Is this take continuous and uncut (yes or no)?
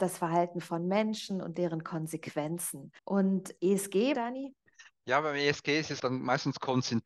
no